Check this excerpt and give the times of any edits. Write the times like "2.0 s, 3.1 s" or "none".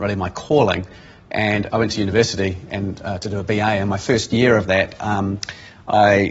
1.7 s